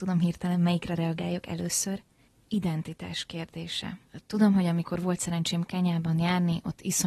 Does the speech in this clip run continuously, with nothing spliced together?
yes; 0 cuts

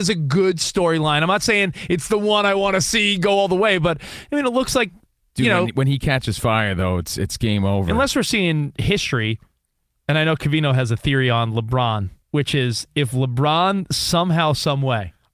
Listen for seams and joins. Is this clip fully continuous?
no; 1 cut; at 12.2 s

